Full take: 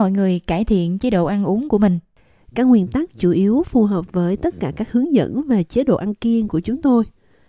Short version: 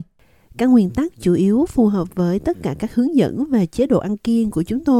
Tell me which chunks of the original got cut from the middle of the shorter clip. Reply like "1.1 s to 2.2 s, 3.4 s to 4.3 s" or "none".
none